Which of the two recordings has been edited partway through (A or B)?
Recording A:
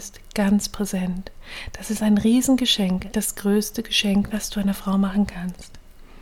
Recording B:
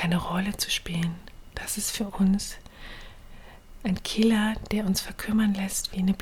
A